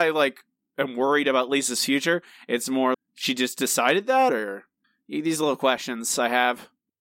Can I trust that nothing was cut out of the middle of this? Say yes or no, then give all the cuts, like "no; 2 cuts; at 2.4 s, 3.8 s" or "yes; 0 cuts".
no; 2 cuts; at 2.9 s, 4.3 s